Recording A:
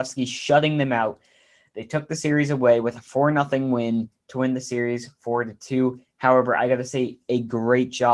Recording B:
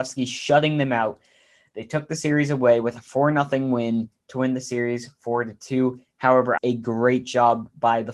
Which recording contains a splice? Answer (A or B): B